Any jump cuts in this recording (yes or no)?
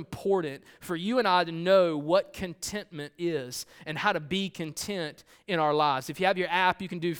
no